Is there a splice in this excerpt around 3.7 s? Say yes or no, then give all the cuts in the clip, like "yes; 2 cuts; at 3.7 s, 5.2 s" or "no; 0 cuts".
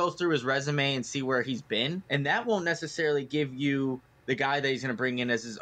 no; 1 cut; at 2.1 s